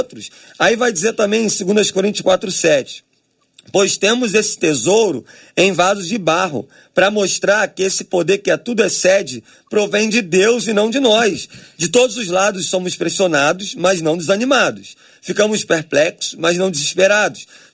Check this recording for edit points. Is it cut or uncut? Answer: uncut